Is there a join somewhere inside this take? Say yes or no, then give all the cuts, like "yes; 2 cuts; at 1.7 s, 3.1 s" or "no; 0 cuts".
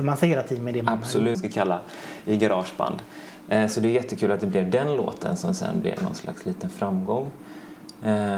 yes; 1 cut; at 1.3 s